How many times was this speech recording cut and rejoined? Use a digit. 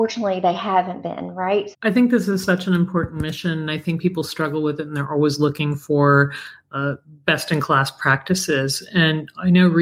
1